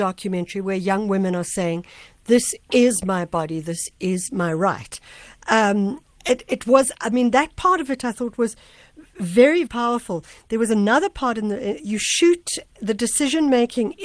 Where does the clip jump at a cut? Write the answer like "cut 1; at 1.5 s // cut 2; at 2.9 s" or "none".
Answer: cut 1; at 9.7 s // cut 2; at 11.8 s